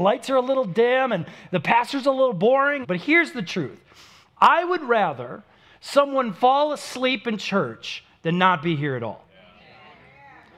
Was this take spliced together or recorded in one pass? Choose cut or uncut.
cut